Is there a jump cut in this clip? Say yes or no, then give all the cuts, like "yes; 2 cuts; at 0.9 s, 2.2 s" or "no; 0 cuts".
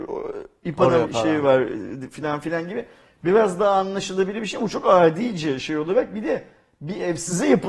yes; 1 cut; at 1.0 s